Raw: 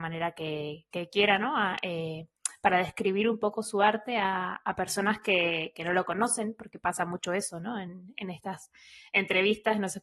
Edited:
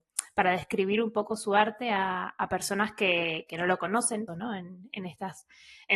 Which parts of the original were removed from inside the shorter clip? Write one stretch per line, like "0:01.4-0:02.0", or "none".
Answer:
0:06.5-0:07.5